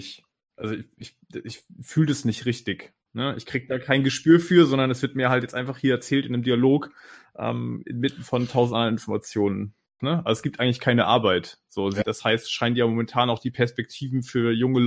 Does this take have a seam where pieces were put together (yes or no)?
yes